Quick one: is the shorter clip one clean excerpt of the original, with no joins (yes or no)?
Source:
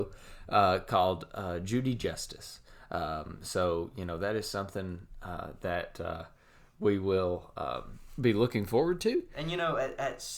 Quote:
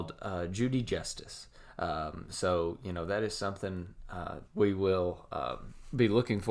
no